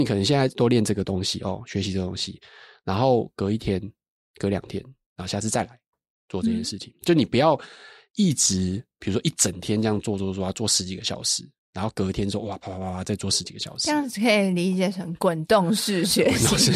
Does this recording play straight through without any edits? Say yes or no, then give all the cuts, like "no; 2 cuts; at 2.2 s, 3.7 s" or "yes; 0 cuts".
yes; 0 cuts